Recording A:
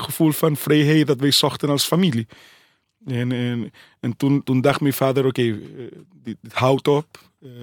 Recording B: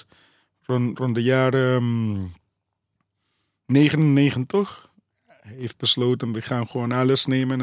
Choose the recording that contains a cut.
A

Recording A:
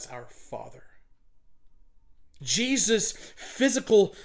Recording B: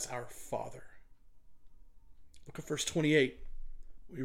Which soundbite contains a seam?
A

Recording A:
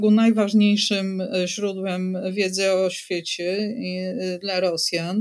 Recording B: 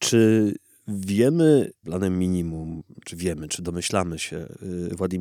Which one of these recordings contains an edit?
B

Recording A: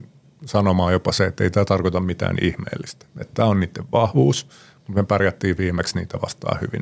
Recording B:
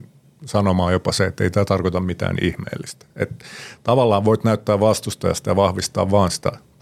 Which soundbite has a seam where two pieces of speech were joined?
B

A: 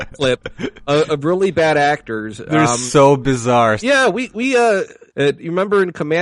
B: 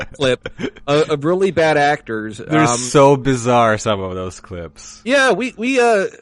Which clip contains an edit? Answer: A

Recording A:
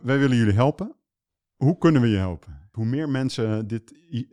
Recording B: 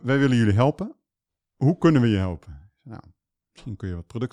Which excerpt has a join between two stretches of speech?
A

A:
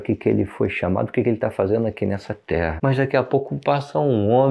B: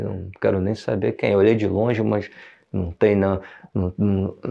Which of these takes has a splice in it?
A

